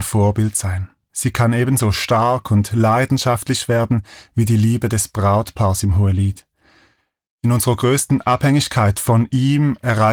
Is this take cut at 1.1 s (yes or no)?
yes